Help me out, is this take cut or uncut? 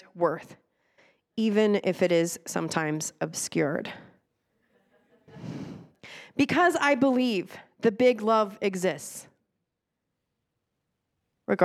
uncut